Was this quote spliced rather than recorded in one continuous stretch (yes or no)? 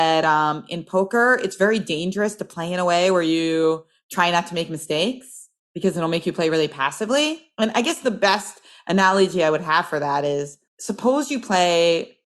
yes